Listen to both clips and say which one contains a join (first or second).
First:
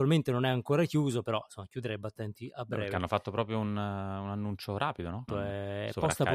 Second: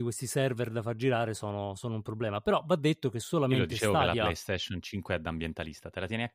first